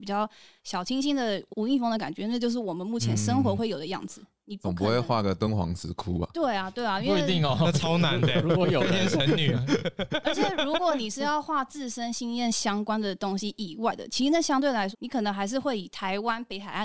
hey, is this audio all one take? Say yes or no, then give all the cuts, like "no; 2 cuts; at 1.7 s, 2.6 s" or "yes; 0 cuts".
no; 1 cut; at 14.9 s